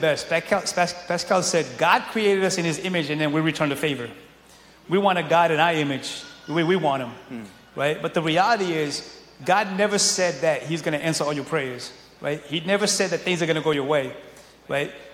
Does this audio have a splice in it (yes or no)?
no